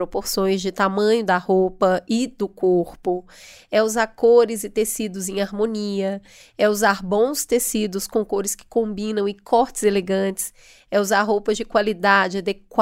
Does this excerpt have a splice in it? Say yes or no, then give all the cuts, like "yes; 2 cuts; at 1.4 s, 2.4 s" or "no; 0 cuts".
no; 0 cuts